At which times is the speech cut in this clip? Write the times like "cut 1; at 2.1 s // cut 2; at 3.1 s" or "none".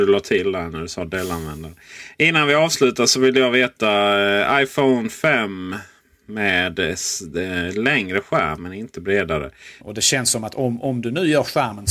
cut 1; at 9.8 s